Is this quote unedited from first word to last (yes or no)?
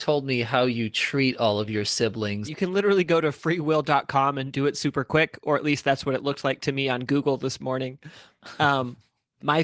no